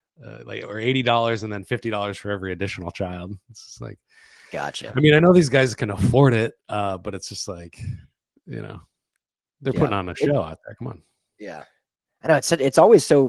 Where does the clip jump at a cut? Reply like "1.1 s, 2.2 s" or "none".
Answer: none